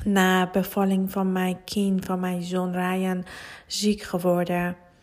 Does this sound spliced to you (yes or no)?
no